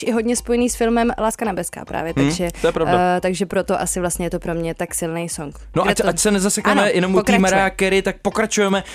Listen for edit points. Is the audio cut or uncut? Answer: uncut